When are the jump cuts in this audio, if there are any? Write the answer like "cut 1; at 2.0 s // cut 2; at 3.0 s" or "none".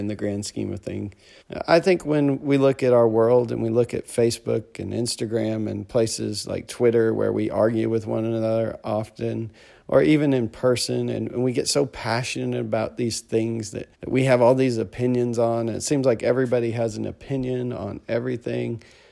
cut 1; at 1.4 s // cut 2; at 13.9 s